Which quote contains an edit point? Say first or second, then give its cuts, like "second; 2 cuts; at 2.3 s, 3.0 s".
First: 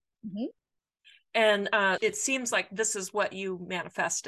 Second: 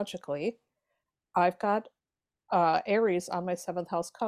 first; 1 cut; at 2.0 s